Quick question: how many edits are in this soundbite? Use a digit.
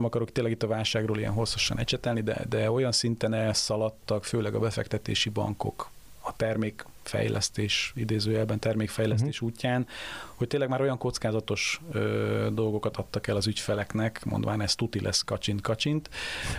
0